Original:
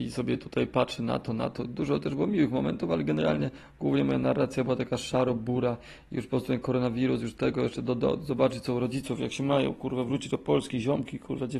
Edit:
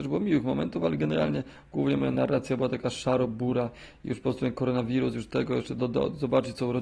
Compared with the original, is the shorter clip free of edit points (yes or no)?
yes